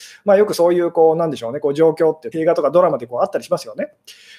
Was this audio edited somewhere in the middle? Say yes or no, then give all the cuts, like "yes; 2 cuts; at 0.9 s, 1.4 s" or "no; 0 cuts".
yes; 1 cut; at 2.3 s